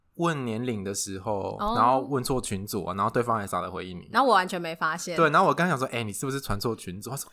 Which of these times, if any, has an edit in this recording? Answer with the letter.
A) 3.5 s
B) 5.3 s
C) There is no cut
A